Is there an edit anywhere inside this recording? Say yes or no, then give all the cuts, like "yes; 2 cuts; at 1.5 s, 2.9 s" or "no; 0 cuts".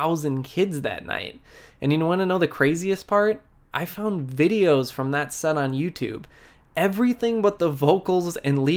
no; 0 cuts